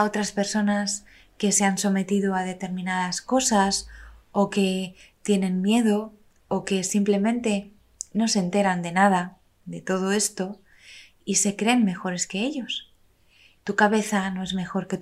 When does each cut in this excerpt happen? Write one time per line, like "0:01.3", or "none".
0:13.6